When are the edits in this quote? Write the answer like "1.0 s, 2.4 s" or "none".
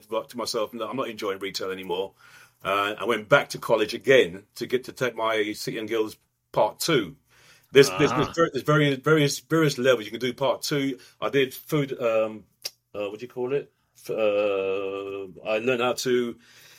none